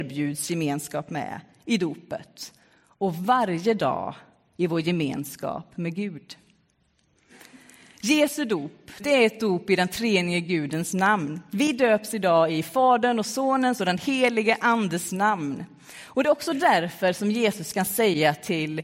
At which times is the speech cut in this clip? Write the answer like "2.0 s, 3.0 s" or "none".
9.0 s